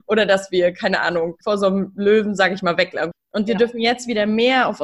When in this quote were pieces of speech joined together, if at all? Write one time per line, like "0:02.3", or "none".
0:01.4
0:03.1